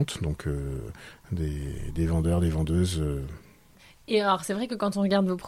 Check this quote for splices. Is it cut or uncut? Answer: uncut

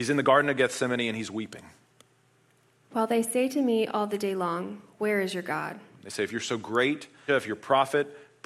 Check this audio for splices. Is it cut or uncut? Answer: cut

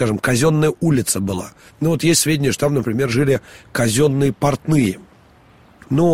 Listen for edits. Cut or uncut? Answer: cut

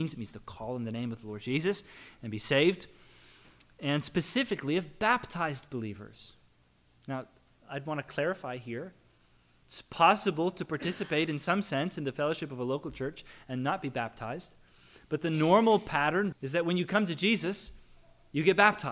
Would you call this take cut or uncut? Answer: cut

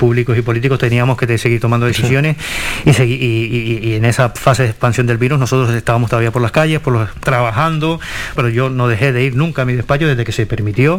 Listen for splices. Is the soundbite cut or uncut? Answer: cut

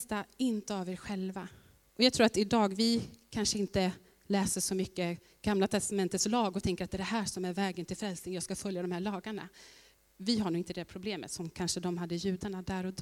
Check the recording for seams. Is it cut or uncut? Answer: cut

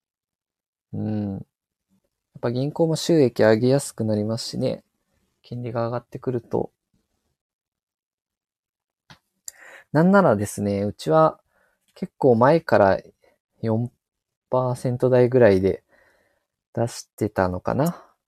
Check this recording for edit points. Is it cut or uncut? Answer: uncut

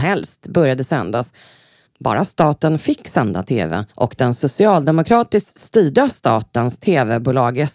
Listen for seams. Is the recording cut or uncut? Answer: cut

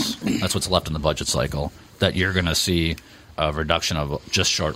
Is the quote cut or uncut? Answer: cut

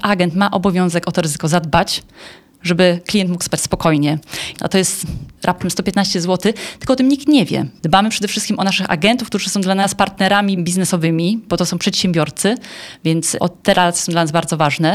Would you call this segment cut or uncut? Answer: cut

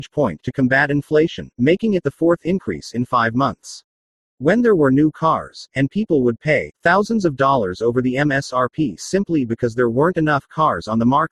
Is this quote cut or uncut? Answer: cut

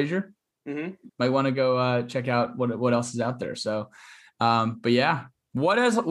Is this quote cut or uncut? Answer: cut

